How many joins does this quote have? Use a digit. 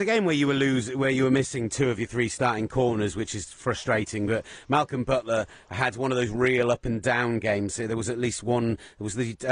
0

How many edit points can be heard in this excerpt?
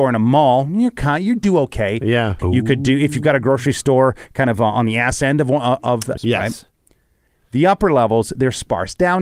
2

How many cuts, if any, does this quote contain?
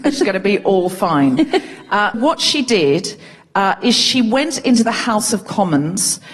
1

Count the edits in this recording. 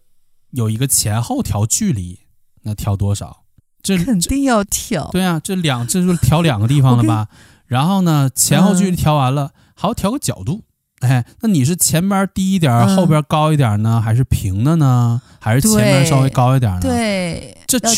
0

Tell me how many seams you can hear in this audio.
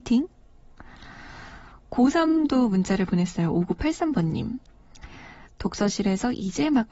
1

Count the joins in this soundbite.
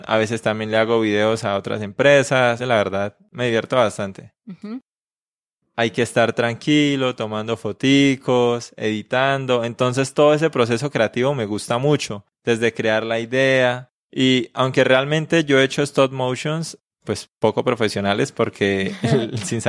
2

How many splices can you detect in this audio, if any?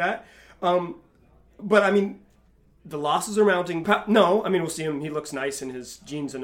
1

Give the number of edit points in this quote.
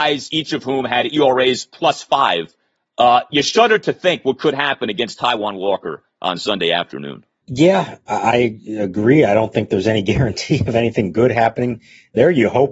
0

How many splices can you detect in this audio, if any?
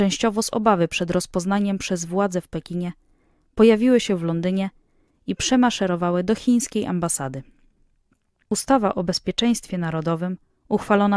1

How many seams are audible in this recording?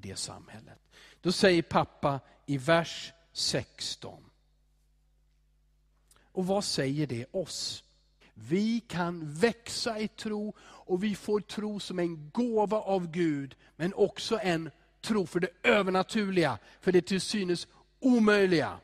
2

